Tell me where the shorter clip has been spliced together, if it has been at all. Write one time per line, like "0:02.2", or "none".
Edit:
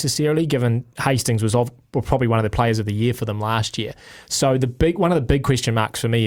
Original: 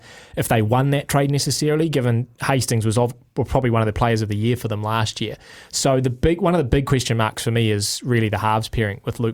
none